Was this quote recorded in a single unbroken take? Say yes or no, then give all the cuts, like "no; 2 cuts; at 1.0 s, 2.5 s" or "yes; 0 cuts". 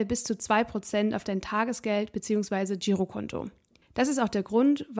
no; 1 cut; at 3.8 s